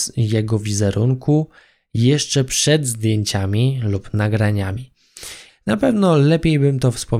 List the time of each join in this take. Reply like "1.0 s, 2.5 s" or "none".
5.5 s